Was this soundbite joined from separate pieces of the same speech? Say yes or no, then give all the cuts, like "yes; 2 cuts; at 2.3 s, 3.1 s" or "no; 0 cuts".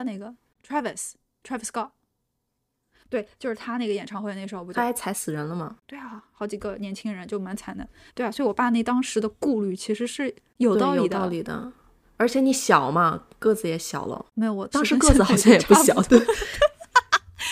yes; 1 cut; at 14.7 s